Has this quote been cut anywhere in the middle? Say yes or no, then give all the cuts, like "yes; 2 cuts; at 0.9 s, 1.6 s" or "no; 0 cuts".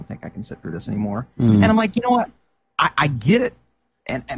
no; 0 cuts